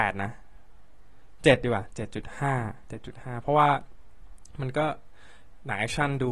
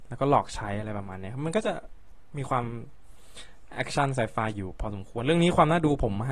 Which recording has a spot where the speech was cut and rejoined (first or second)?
first